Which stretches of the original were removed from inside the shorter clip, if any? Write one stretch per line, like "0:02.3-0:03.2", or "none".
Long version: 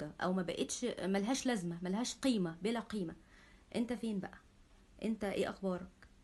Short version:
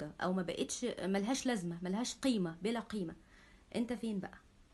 none